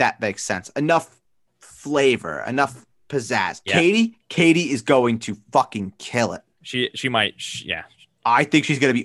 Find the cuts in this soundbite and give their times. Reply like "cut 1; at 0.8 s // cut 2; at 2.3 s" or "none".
cut 1; at 3.7 s // cut 2; at 6.6 s